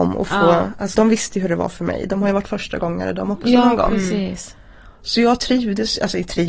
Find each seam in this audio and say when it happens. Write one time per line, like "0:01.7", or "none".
0:00.9